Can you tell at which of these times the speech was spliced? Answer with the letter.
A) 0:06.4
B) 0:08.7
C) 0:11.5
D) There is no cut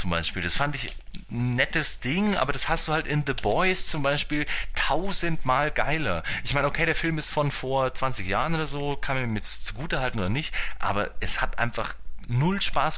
D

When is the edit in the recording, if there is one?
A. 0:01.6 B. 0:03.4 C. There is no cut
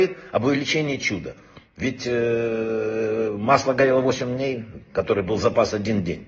C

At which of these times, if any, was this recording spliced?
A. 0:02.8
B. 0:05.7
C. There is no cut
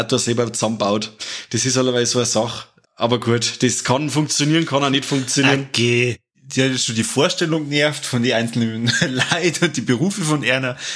A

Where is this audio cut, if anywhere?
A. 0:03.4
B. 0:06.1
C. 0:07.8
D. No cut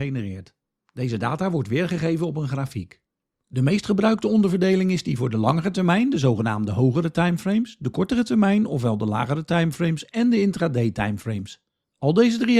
A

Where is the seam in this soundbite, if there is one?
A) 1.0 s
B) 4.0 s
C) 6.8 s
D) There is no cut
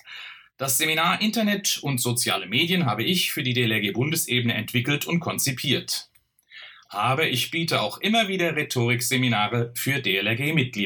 C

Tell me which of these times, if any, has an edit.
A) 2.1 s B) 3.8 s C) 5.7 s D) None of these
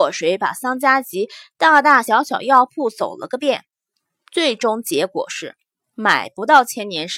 D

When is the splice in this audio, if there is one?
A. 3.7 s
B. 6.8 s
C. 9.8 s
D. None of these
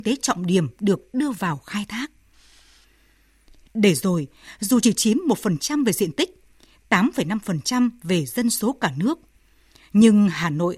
A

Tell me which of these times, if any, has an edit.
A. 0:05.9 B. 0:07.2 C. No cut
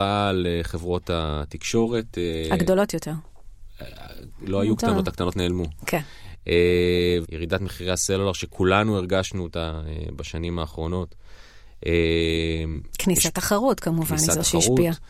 B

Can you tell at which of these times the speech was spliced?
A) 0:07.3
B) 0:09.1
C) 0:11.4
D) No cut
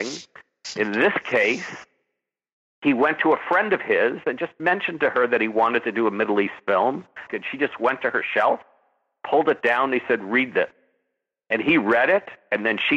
A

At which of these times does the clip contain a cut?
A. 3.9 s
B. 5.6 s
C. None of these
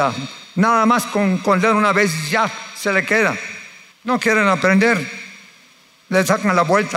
A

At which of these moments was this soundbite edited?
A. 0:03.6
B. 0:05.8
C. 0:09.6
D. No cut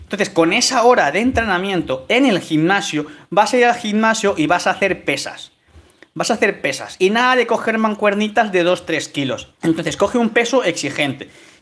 C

